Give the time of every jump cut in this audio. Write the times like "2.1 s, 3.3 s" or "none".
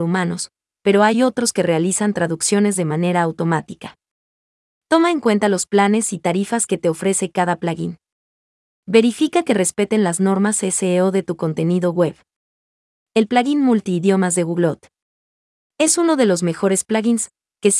none